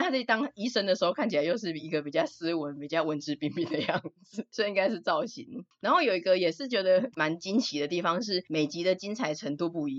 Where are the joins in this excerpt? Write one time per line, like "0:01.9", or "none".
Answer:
none

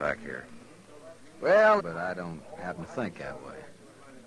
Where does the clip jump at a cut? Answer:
0:01.8

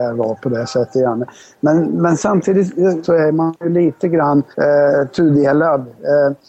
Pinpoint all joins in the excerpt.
0:03.0
0:04.5

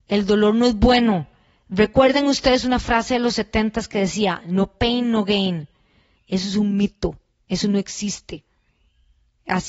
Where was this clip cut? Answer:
0:06.2

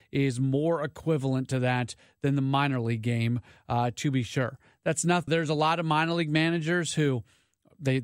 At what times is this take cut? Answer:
0:05.3

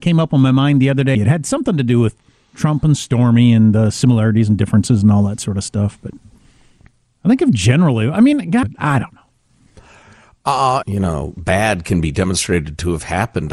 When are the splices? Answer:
0:01.1
0:08.6
0:10.8

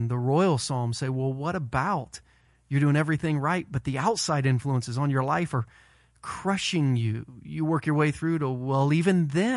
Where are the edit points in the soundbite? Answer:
none

